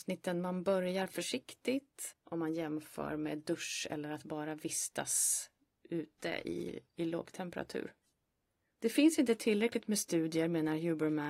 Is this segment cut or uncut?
cut